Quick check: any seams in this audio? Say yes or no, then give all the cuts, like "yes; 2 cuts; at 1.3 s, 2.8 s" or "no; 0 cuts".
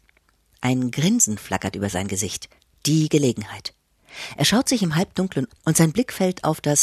yes; 1 cut; at 5.5 s